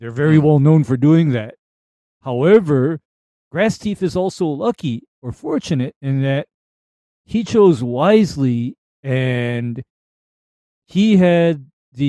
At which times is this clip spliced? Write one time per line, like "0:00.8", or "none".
none